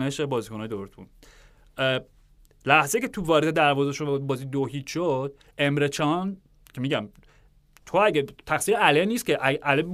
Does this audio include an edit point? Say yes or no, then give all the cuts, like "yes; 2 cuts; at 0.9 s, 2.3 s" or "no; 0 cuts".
no; 0 cuts